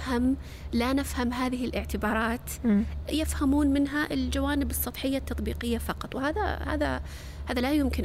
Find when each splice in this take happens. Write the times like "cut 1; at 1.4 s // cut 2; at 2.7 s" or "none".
cut 1; at 3.1 s